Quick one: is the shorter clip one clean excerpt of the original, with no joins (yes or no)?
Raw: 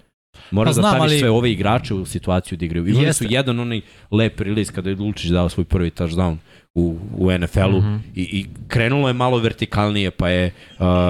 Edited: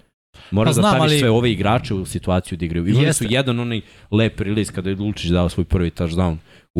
yes